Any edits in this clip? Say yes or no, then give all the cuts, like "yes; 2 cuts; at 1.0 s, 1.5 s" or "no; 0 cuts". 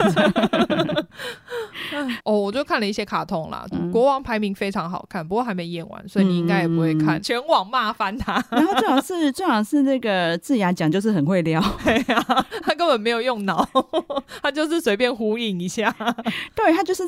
yes; 2 cuts; at 3.7 s, 7.2 s